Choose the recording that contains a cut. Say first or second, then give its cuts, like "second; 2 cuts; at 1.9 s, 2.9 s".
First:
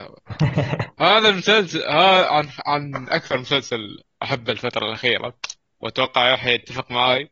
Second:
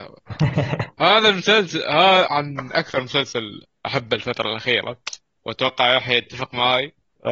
second; 1 cut; at 2.3 s